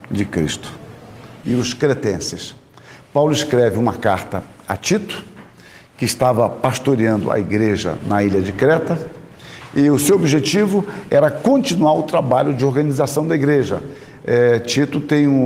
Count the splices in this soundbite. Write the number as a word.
one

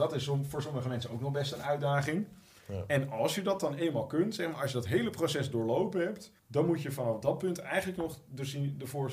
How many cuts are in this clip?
one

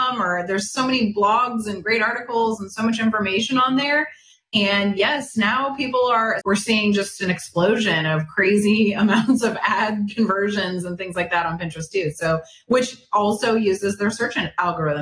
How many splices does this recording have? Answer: one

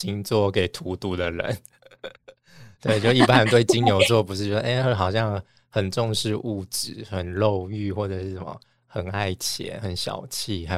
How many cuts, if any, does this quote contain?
zero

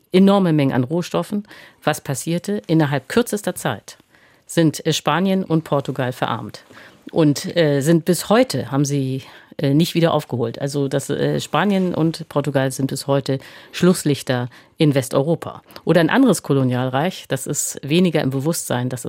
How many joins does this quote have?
one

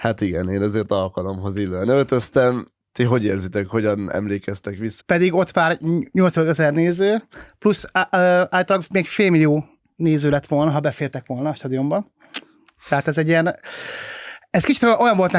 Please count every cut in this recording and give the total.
one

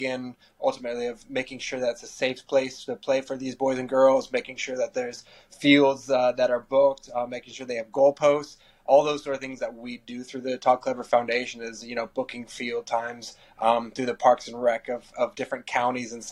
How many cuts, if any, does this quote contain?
zero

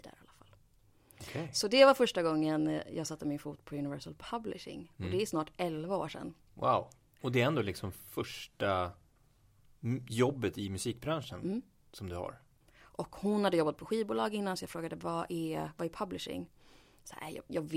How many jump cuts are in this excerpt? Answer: two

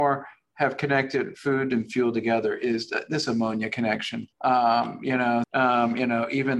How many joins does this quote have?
two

